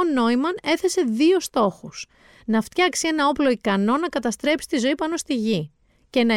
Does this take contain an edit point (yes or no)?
no